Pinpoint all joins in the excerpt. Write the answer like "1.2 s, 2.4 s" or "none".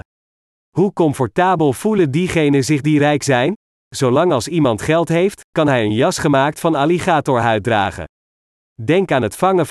none